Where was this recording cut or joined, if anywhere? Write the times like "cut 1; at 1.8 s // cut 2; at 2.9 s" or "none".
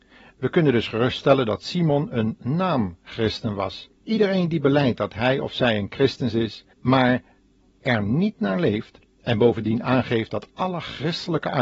cut 1; at 4.0 s // cut 2; at 6.7 s